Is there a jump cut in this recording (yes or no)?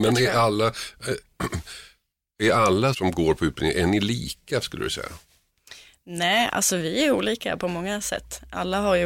yes